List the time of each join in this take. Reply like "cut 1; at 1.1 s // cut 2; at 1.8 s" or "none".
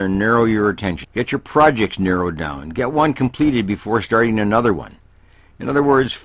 cut 1; at 1.0 s